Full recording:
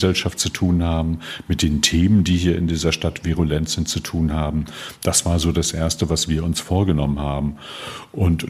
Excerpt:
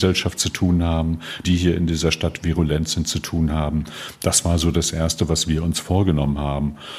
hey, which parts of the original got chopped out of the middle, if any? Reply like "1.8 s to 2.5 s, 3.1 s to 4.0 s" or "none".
1.4 s to 2.2 s

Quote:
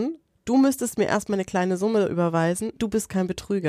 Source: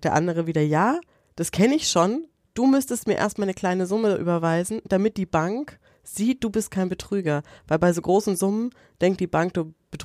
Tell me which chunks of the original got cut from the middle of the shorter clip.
4.8 s to 6.3 s

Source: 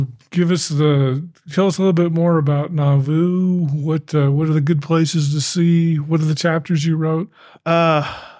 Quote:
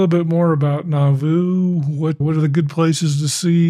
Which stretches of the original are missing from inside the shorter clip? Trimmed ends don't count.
4.1 s to 4.3 s

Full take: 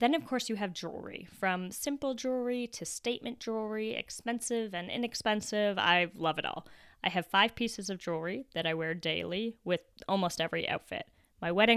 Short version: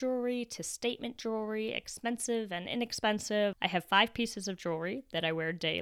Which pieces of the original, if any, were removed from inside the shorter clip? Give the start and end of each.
5.8 s to 6.9 s

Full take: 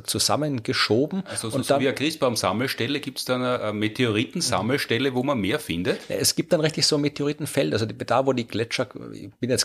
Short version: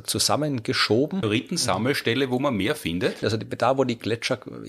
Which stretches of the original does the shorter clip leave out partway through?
1.2 s to 4.1 s, 6.1 s to 7.7 s

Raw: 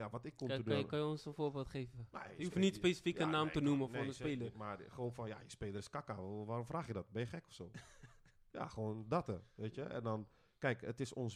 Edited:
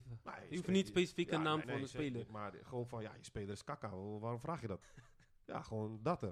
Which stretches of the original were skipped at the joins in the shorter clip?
3.5 s to 3.9 s, 7.1 s to 7.9 s

